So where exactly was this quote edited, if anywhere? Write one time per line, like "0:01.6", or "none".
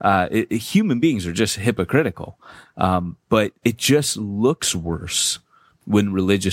none